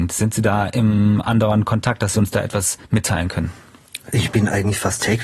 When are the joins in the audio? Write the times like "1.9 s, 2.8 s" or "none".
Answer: 2.8 s